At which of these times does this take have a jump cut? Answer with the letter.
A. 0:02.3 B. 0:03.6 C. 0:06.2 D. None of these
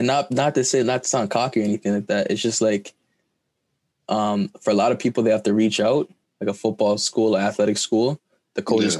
C